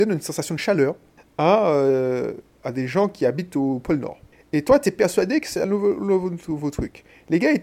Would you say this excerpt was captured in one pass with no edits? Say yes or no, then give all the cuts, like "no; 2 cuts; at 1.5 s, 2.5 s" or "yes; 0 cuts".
yes; 0 cuts